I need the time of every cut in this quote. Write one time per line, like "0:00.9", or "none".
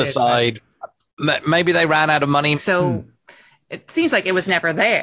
0:02.5